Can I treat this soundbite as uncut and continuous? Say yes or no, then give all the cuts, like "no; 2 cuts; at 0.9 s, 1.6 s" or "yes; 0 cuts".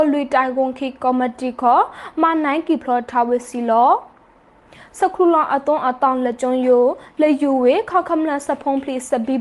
yes; 0 cuts